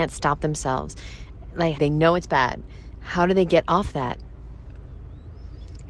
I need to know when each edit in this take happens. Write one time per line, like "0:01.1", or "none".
0:01.8